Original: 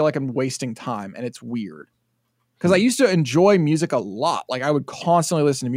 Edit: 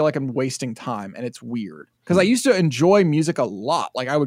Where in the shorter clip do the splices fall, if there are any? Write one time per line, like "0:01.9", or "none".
0:02.0